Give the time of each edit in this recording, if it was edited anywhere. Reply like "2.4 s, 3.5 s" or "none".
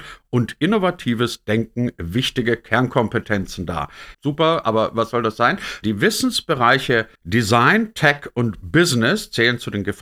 4.1 s, 5.8 s, 7.2 s